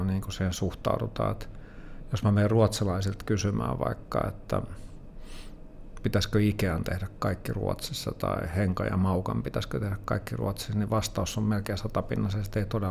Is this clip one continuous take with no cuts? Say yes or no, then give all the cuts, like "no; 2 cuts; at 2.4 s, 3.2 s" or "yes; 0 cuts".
yes; 0 cuts